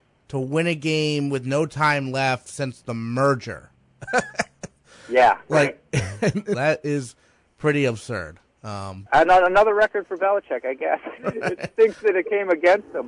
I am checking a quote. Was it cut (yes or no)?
yes